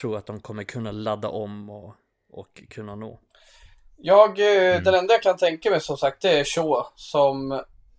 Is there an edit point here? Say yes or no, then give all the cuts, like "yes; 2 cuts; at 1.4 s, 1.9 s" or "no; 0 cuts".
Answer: no; 0 cuts